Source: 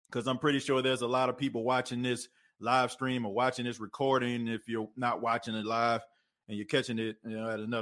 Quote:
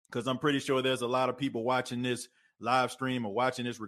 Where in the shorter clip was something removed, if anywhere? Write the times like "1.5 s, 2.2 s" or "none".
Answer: none

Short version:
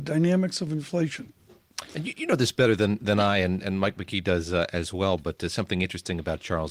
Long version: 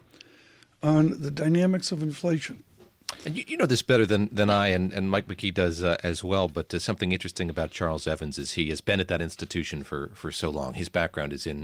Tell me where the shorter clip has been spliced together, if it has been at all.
none

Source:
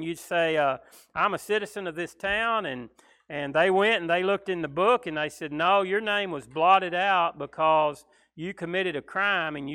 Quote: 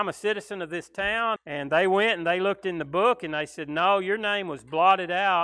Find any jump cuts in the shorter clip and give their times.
1.4 s

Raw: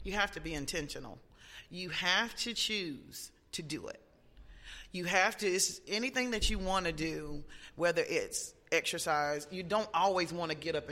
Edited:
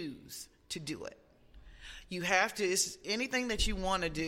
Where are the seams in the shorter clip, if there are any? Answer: none

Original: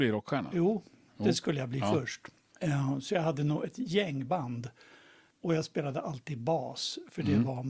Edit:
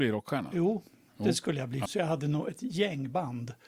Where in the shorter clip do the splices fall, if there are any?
1.9 s

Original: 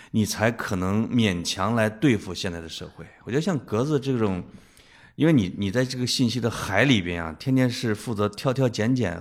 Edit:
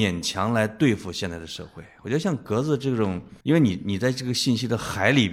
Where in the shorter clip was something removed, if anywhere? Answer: 3.4 s

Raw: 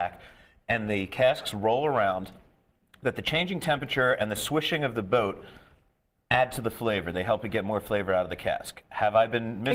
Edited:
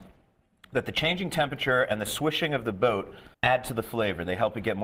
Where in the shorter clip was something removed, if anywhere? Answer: 3.3 s

